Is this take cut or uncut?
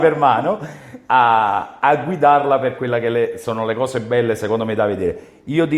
uncut